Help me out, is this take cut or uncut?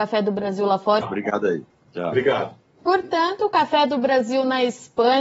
cut